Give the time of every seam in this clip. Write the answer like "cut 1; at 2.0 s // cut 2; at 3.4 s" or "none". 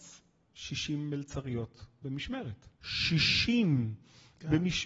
cut 1; at 2.8 s